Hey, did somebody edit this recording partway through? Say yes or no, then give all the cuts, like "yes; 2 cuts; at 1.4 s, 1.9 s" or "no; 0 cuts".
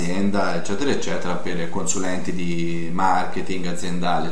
no; 0 cuts